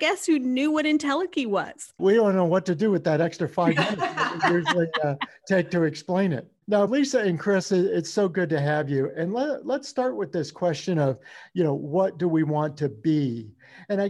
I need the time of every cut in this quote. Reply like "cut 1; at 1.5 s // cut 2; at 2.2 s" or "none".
cut 1; at 2.0 s // cut 2; at 6.9 s